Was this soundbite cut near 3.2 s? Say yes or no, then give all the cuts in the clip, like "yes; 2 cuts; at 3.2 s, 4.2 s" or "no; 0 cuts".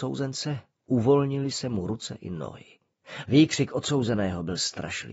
yes; 1 cut; at 3.2 s